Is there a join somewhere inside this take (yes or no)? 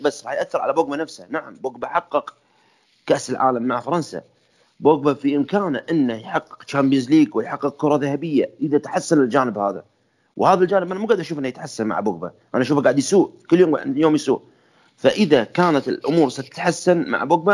no